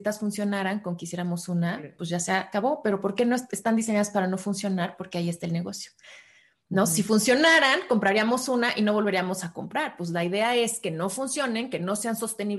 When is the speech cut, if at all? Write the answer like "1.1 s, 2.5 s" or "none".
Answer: none